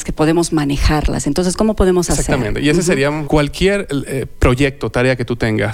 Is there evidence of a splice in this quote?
yes; 1 cut; at 3.2 s

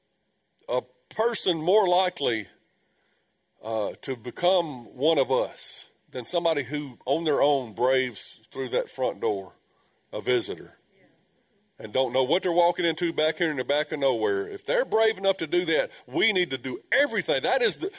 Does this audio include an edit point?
no; 0 cuts

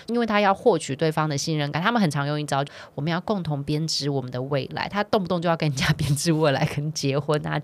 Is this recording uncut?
yes; 0 cuts

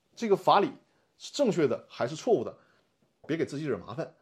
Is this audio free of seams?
no; 1 cut; at 3.2 s

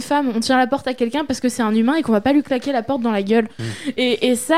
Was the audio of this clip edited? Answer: no; 0 cuts

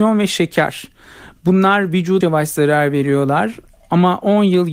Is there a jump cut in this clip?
yes; 1 cut; at 2.2 s

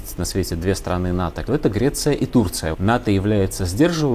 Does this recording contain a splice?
yes; 2 cuts; at 1.4 s, 2.7 s

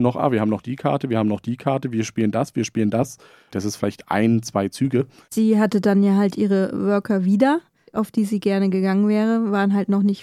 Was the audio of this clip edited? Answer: yes; 3 cuts; at 3.5 s, 5.2 s, 7.9 s

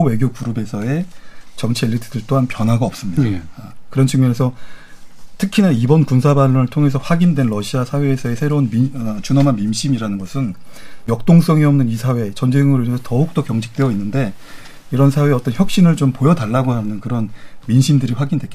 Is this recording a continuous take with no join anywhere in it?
yes; 0 cuts

